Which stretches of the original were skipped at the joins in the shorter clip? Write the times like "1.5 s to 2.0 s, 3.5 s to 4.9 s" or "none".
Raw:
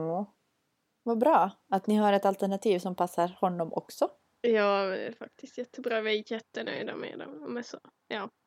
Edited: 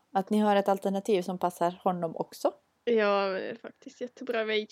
none